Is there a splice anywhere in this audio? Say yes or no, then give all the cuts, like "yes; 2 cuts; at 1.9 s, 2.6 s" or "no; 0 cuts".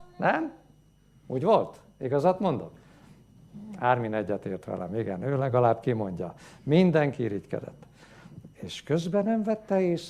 no; 0 cuts